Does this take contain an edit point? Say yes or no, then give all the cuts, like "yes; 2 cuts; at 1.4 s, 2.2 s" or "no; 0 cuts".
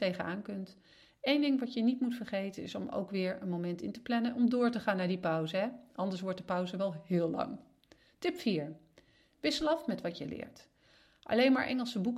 no; 0 cuts